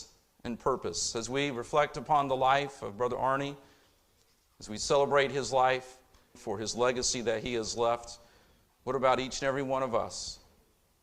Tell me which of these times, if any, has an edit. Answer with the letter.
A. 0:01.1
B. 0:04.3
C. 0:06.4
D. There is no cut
C